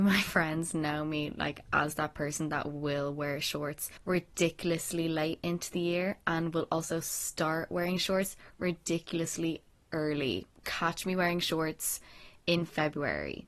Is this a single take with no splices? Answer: yes; 0 cuts

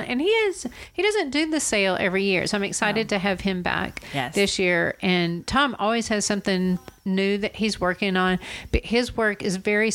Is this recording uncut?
yes; 0 cuts

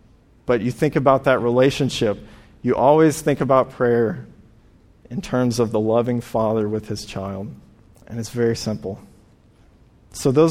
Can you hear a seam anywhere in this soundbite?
no; 0 cuts

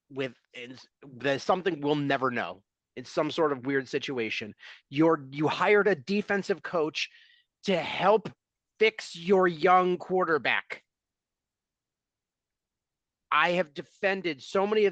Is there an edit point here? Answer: no; 0 cuts

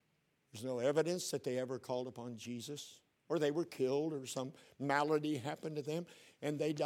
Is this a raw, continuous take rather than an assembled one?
yes; 0 cuts

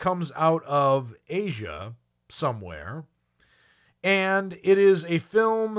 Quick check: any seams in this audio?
no; 0 cuts

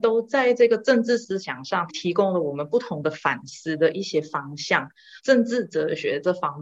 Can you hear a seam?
yes; 2 cuts; at 1.9 s, 5.2 s

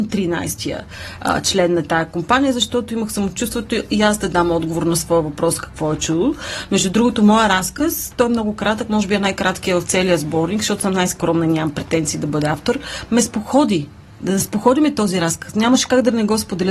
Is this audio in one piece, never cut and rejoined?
yes; 0 cuts

